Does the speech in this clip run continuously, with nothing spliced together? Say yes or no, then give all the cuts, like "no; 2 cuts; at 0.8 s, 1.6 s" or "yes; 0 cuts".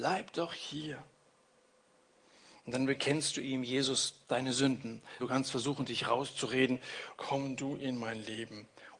no; 2 cuts; at 5.2 s, 7.1 s